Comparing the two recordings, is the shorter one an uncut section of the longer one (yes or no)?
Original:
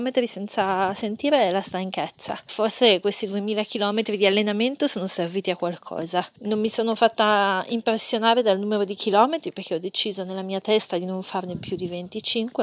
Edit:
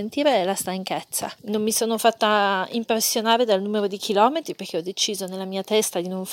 no